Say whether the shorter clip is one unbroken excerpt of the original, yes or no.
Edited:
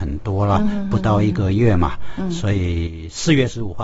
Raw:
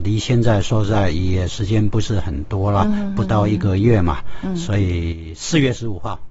yes